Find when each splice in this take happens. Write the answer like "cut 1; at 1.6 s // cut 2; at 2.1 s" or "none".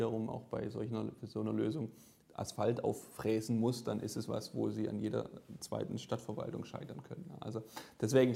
none